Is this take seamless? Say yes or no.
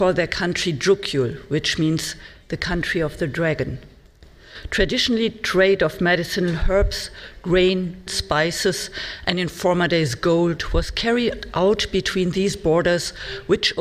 no